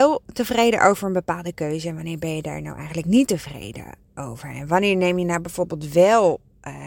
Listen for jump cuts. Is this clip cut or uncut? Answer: uncut